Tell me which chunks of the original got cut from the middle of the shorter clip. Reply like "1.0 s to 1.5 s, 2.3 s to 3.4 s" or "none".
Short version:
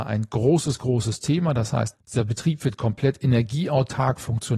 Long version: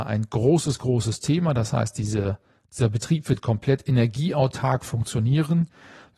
1.9 s to 2.6 s